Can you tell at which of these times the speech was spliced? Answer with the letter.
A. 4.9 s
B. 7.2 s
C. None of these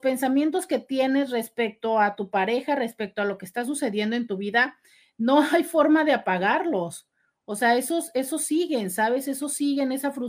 C